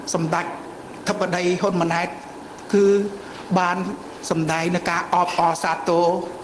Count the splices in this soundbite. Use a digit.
0